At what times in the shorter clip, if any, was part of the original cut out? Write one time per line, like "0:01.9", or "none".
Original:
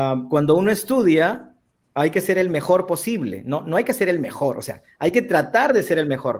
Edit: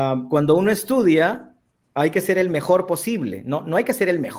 none